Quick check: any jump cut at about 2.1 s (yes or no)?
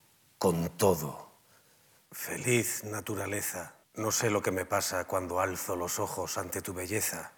yes